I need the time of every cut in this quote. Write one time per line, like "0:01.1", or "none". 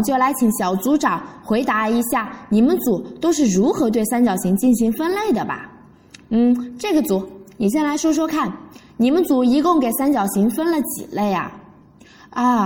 none